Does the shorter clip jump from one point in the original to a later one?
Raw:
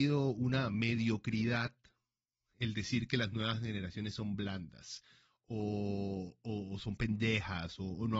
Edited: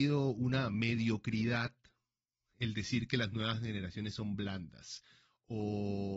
no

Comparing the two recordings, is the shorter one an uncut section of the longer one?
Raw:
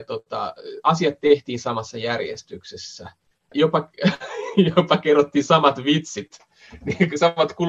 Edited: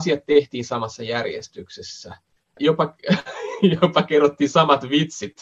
yes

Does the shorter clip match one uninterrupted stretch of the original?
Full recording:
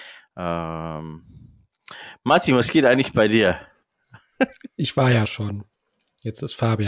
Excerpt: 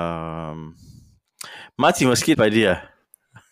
no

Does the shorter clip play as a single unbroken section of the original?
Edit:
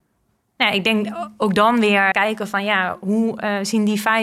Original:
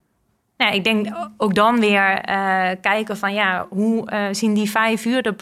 no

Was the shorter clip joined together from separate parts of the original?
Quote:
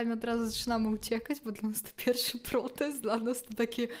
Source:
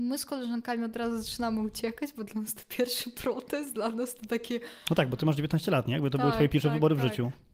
no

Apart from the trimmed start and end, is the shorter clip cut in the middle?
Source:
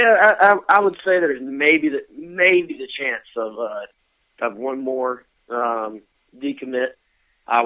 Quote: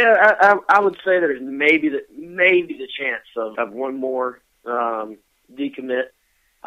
yes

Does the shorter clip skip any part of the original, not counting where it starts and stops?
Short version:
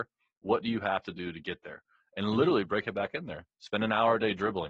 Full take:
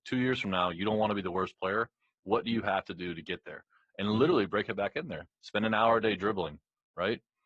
no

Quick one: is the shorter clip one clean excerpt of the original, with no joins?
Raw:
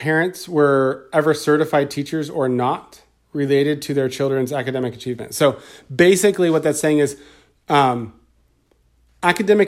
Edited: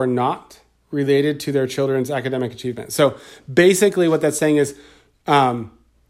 yes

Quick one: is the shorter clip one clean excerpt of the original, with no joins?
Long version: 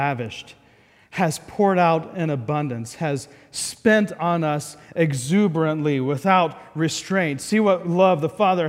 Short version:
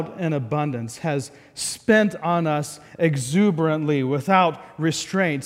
yes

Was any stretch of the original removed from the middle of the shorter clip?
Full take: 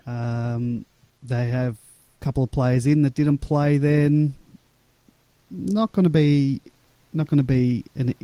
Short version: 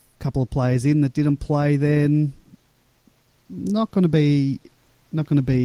no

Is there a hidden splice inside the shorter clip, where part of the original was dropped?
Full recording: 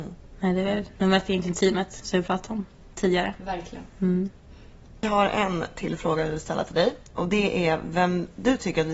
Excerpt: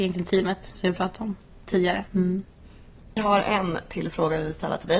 yes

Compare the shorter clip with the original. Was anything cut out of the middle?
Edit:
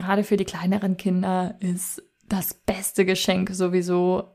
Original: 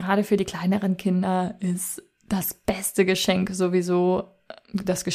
no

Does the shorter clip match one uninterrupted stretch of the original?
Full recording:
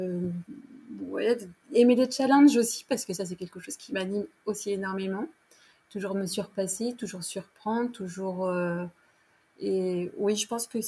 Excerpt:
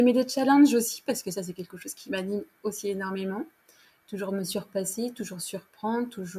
yes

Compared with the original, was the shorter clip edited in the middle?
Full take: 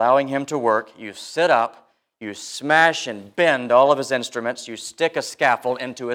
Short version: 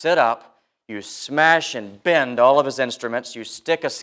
no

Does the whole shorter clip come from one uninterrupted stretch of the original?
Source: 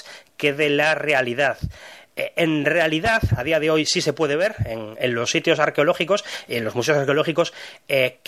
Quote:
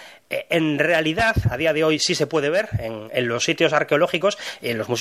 yes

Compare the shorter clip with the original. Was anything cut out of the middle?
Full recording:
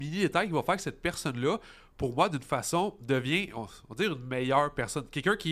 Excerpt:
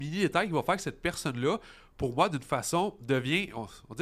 no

